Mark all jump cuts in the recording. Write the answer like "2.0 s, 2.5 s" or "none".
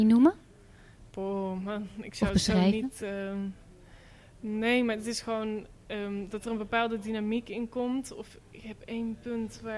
none